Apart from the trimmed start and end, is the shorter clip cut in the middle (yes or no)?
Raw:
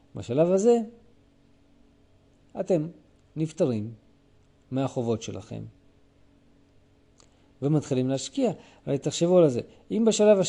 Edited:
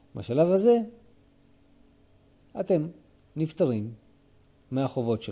no